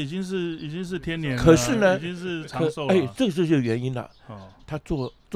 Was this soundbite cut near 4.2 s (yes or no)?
no